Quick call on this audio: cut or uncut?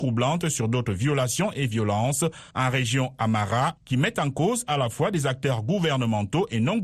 cut